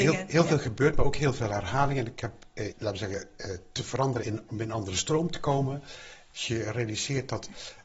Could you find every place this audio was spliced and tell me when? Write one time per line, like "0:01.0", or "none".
0:02.7
0:04.5
0:06.3